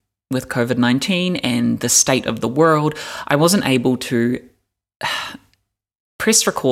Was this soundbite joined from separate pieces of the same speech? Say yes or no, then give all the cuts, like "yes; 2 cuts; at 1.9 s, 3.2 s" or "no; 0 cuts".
no; 0 cuts